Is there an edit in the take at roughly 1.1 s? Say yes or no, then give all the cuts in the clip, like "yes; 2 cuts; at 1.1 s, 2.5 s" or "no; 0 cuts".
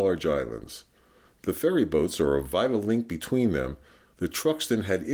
no; 1 cut; at 4.1 s